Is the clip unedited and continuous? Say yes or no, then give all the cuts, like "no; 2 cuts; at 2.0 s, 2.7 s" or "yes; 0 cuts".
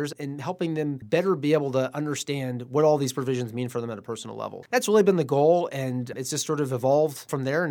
yes; 0 cuts